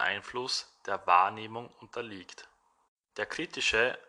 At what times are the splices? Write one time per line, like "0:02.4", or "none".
none